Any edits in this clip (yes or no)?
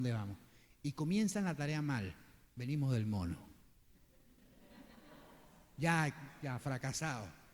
no